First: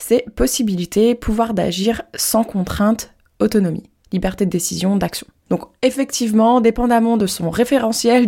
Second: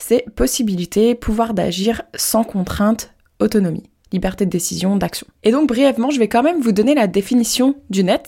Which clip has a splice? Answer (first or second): second